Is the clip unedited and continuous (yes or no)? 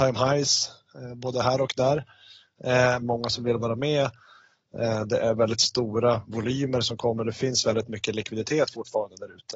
no